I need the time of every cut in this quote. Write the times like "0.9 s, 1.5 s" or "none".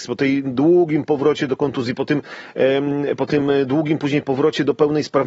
3.2 s